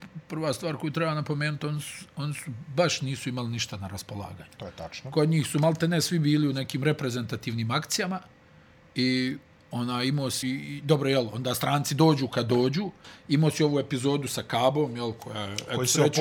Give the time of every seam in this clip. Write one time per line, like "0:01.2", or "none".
0:10.4